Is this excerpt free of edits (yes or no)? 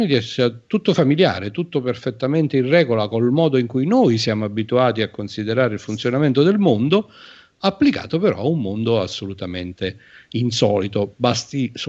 yes